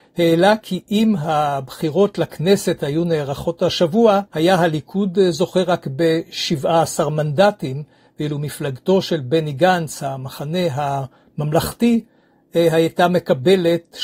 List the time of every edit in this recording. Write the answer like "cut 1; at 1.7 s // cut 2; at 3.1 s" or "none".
cut 1; at 4.3 s